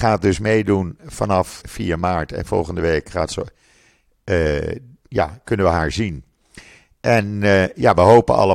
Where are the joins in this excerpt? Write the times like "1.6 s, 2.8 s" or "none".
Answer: 1.6 s